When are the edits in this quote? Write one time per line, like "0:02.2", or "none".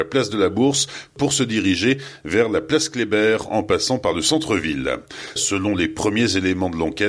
0:05.4